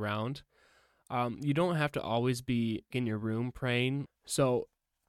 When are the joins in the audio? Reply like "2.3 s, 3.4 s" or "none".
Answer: 2.9 s, 4.1 s